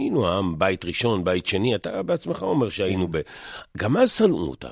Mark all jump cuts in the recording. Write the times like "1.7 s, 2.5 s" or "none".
none